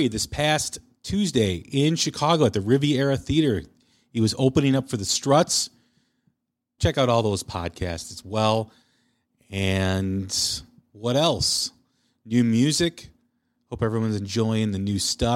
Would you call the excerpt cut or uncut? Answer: cut